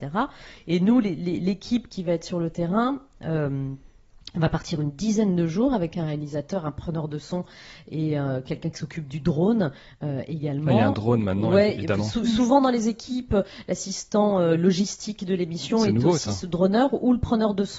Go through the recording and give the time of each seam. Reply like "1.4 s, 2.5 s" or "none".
none